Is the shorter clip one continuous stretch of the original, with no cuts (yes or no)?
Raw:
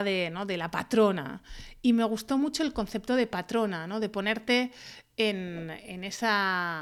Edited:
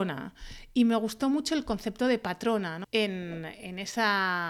no